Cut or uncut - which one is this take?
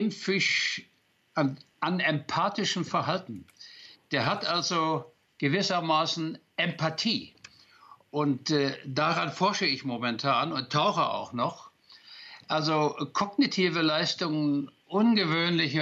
uncut